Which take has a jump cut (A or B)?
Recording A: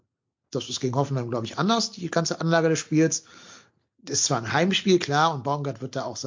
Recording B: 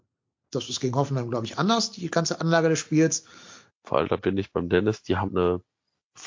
B